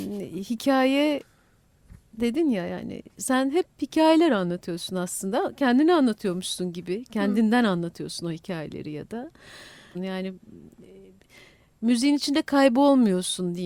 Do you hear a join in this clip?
yes; 1 cut; at 9.9 s

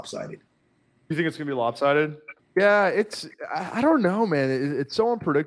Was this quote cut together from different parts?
yes; 1 cut; at 2.4 s

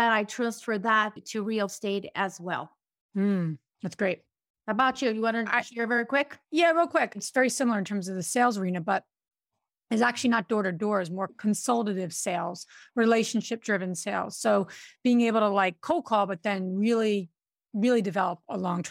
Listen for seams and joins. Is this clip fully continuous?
no; 1 cut; at 7.1 s

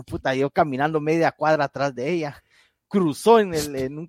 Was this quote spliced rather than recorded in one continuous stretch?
no; 0 cuts

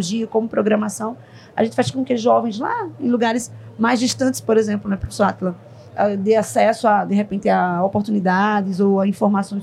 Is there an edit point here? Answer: no; 0 cuts

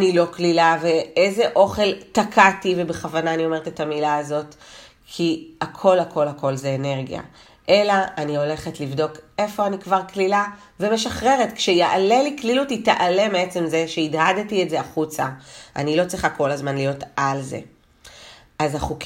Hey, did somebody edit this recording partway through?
no; 0 cuts

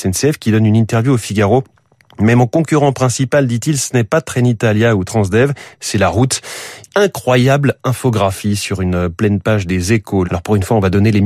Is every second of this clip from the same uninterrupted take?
no; 2 cuts; at 6.9 s, 10.2 s

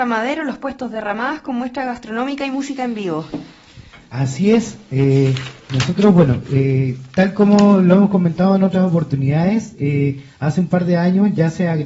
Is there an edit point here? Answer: no; 0 cuts

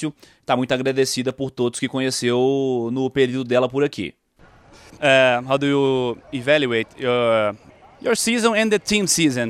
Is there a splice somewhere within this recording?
no; 0 cuts

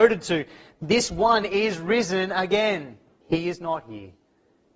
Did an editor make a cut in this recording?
yes; 1 cut; at 3.2 s

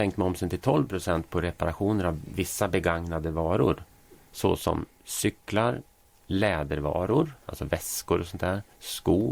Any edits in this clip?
no; 0 cuts

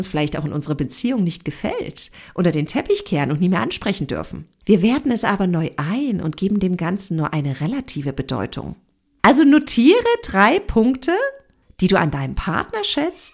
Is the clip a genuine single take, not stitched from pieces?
yes; 0 cuts

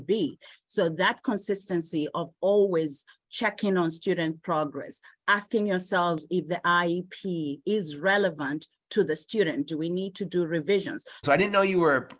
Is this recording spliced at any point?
yes; 1 cut; at 11.2 s

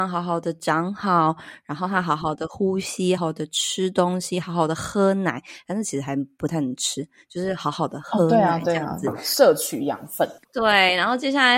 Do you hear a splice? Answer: yes; 2 cuts; at 3.2 s, 10.4 s

